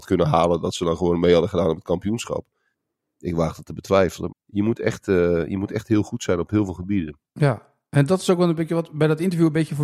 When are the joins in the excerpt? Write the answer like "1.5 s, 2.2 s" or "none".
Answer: 4.3 s